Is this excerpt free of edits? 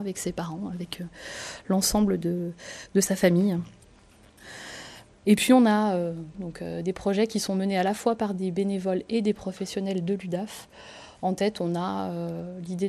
no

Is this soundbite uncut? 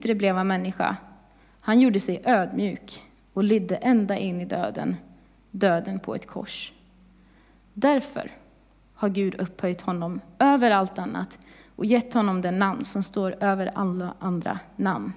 yes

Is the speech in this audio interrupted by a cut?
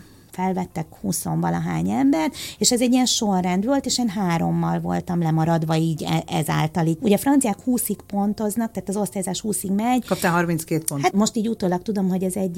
yes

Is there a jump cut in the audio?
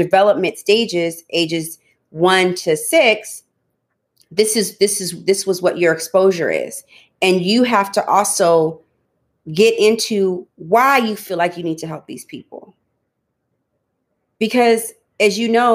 no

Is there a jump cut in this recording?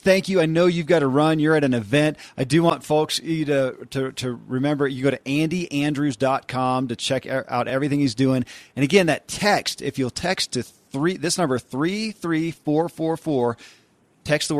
no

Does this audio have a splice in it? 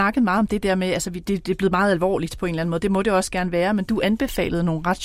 yes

